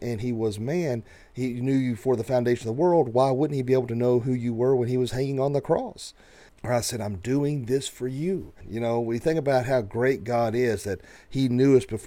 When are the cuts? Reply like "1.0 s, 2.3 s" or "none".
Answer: 6.5 s, 8.6 s